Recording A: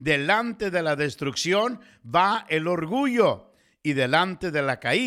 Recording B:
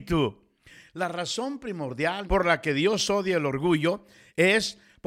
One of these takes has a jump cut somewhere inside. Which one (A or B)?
B